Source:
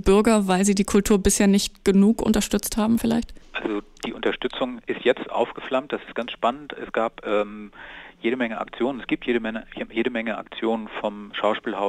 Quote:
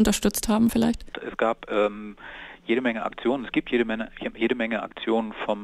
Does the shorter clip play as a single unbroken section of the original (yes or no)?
no